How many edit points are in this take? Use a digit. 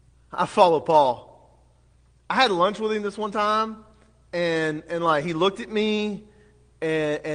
0